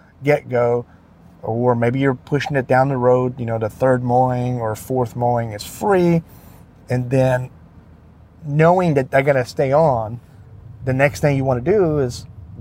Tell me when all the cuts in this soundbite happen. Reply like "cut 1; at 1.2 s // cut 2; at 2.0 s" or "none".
none